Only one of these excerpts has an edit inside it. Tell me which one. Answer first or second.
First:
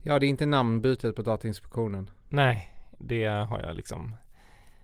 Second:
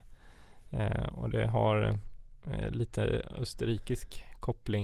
first